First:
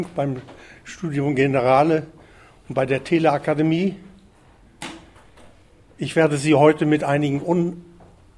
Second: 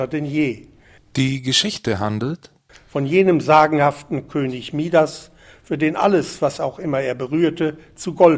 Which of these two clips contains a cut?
second; 1 cut; at 1.0 s

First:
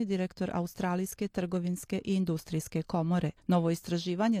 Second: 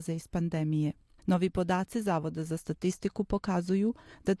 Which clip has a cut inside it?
first; 1 cut; at 3.4 s

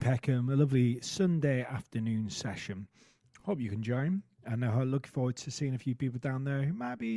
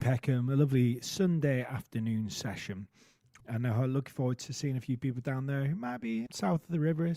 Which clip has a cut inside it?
second; 2 cuts; at 3.4 s, 6.3 s

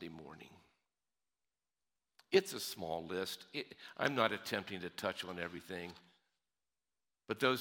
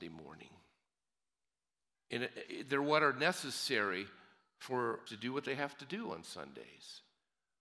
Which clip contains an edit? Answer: second; 2 cuts; at 2.0 s, 5.1 s

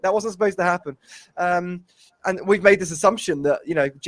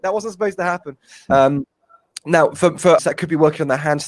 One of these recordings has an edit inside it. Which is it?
second; 2 cuts; at 1.3 s, 3.0 s

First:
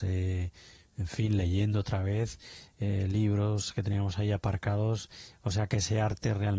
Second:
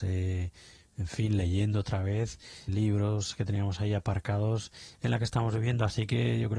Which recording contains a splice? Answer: second; 2 cuts; at 2.7 s, 5.0 s

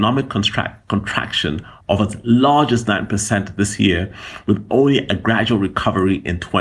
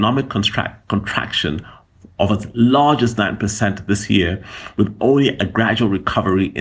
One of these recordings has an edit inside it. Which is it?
first; 1 cut; at 1.8 s

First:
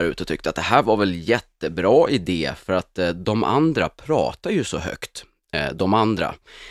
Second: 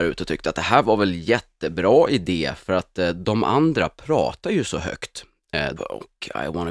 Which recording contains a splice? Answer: second; 1 cut; at 5.8 s

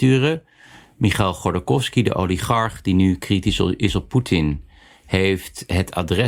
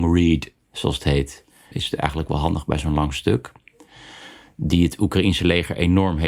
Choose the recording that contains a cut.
second; 2 cuts; at 1.7 s, 4.4 s

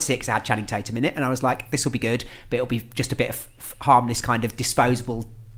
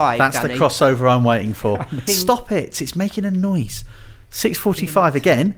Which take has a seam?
second; 1 cut; at 2.1 s

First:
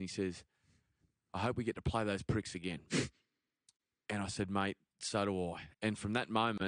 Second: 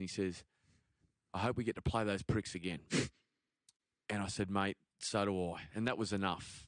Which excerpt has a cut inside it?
first; 1 cut; at 5.7 s

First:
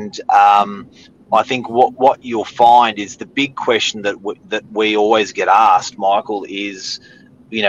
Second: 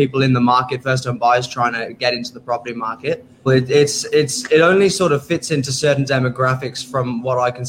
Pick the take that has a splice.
second; 1 cut; at 3.5 s

